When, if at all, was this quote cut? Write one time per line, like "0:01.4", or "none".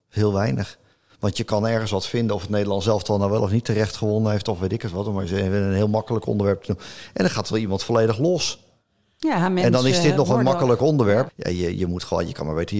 0:11.3